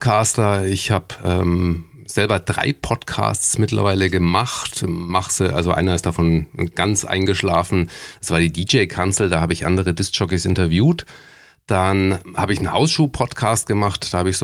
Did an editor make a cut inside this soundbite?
no; 0 cuts

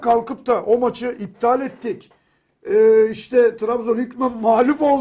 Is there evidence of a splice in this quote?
no; 0 cuts

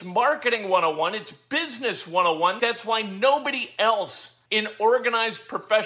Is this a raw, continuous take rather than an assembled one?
no; 2 cuts; at 2.6 s, 4.5 s

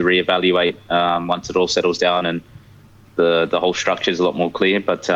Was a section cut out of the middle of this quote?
no; 0 cuts

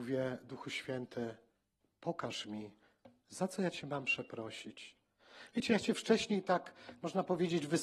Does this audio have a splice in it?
no; 0 cuts

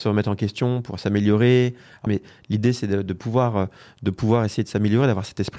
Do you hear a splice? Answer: yes; 1 cut; at 2.1 s

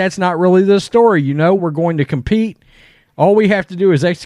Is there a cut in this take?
yes; 2 cuts; at 1.6 s, 3.0 s

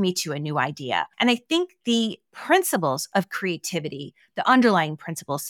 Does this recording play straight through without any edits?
no; 1 cut; at 1.1 s

